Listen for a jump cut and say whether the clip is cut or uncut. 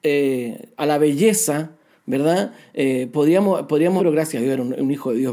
cut